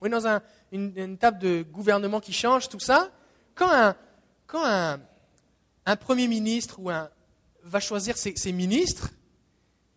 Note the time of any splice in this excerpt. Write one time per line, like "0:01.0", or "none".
none